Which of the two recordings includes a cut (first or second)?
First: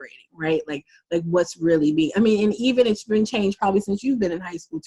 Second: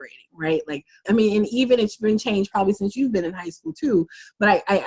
second